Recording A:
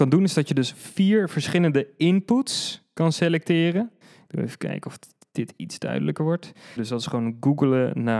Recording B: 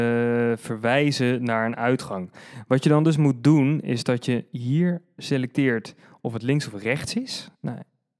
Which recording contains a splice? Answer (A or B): A